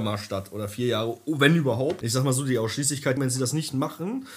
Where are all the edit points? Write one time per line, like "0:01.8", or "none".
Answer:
0:02.0
0:03.2